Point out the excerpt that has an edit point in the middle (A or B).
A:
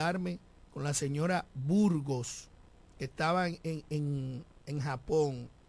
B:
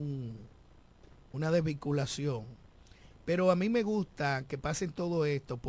B